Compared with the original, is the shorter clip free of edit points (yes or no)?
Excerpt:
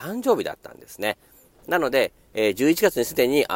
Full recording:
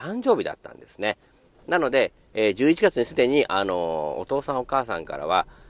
yes